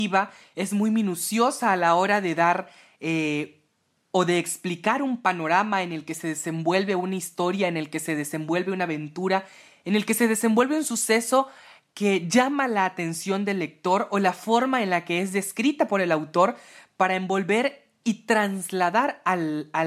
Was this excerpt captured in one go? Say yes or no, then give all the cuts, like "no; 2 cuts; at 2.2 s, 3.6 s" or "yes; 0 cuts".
yes; 0 cuts